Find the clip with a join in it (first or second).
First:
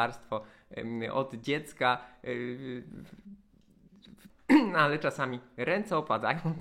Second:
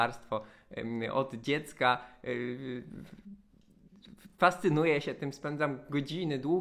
first